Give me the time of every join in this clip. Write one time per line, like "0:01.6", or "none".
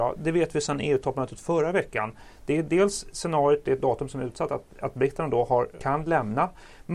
0:03.6
0:05.8